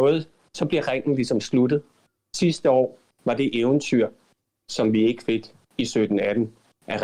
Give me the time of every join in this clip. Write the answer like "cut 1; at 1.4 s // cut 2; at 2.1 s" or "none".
none